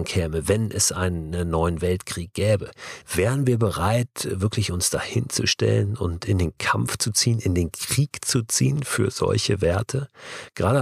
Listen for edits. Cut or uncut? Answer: cut